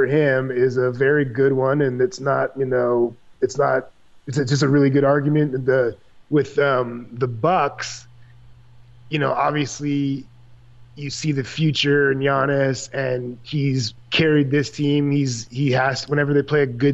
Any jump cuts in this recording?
no; 0 cuts

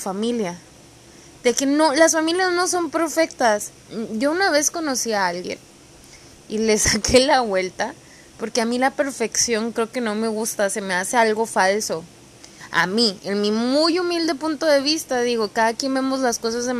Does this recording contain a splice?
no; 0 cuts

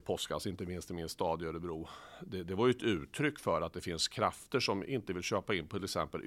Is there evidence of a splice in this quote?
no; 0 cuts

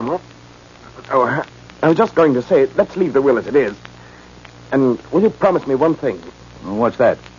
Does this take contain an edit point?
yes; 1 cut; at 1.7 s

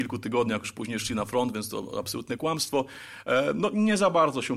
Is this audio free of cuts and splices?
yes; 0 cuts

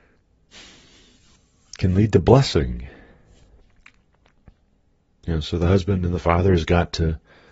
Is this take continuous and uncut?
yes; 0 cuts

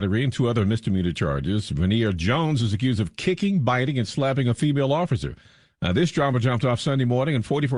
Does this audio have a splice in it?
no; 0 cuts

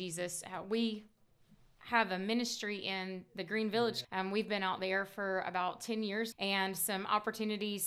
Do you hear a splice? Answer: yes; 2 cuts; at 4.0 s, 6.3 s

